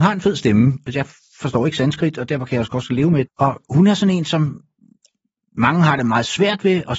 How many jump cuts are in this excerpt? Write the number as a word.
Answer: one